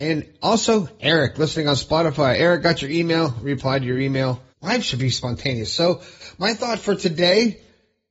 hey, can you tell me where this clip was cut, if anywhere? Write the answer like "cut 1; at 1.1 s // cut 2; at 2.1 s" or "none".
cut 1; at 4.5 s